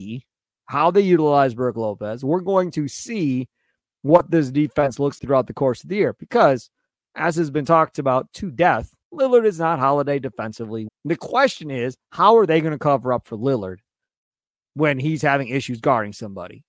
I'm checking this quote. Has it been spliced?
yes; 3 cuts; at 5.2 s, 9.0 s, 10.9 s

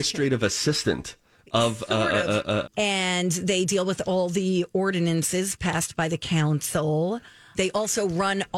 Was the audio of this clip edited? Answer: yes; 3 cuts; at 1.4 s, 2.6 s, 7.5 s

